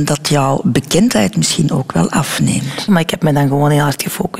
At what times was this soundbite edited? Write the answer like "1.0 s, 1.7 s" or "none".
2.9 s